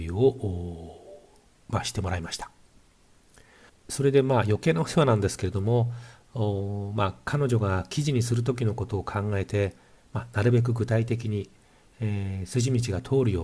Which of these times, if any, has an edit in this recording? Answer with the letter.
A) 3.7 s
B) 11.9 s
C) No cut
A